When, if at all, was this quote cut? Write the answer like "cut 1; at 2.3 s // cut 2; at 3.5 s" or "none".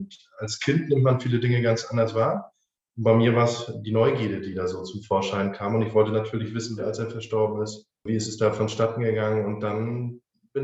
cut 1; at 6.8 s